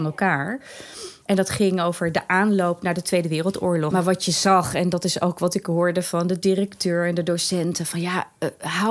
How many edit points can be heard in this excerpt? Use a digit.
2